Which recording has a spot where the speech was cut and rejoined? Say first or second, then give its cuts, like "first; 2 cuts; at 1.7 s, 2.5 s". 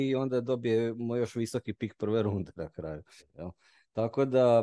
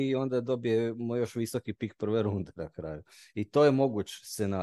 first; 1 cut; at 3.2 s